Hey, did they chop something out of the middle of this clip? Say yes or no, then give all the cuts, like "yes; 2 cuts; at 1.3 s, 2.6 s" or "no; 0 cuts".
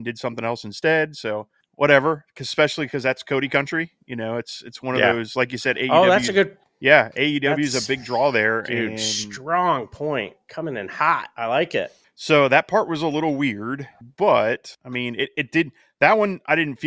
no; 0 cuts